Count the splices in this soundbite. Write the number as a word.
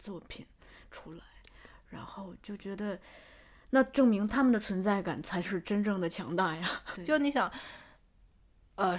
one